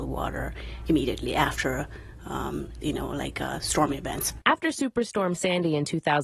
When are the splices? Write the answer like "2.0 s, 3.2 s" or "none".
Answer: 2.8 s